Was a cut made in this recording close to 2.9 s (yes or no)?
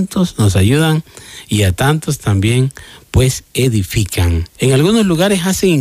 no